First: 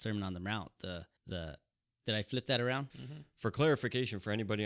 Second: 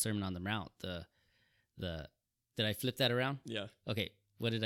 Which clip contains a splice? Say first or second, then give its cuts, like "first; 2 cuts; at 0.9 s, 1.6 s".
first; 2 cuts; at 1.2 s, 2.9 s